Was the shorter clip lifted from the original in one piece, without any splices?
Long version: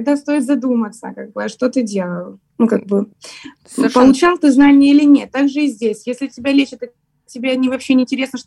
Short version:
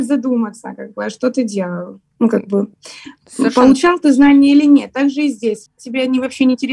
no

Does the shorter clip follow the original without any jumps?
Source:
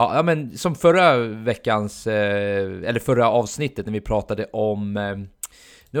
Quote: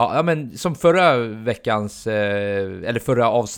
yes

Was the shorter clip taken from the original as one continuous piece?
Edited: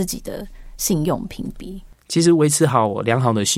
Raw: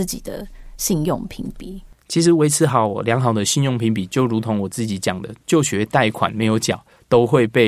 yes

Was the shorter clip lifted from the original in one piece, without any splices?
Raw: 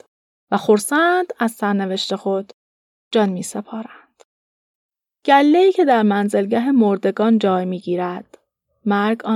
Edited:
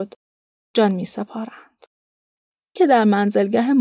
no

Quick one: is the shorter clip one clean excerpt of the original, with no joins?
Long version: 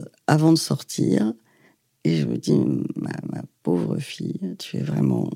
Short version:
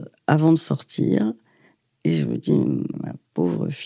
no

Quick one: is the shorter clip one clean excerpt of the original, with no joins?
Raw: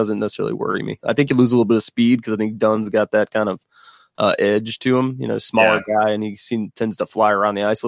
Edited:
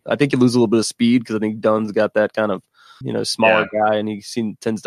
no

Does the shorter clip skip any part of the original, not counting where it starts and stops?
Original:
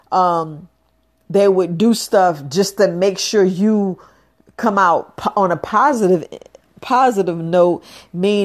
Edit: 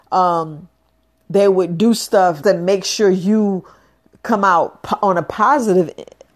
yes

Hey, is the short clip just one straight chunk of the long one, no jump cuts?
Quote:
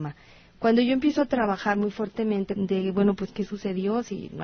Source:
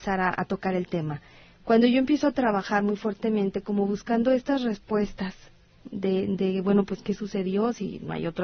no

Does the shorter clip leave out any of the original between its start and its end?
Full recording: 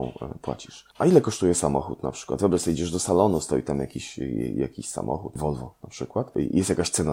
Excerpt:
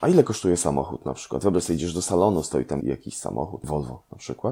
yes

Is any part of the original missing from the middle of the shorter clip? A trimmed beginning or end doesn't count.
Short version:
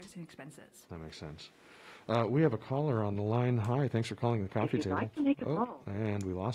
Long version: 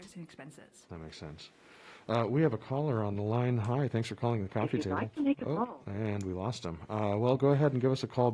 no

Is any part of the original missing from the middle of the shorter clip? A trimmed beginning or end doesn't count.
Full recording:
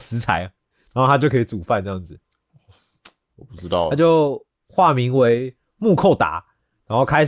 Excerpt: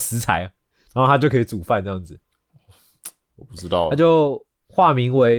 no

